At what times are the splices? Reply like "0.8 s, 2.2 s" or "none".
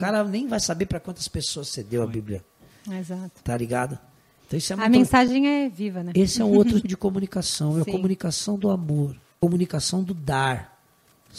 6.8 s